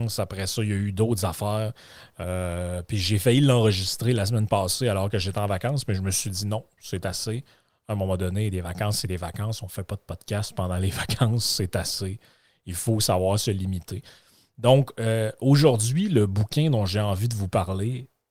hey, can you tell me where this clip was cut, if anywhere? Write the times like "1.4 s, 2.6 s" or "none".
none